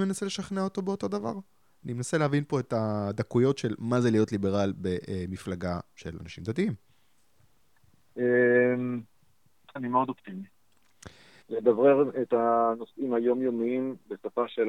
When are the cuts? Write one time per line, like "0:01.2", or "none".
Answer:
0:09.8
0:11.4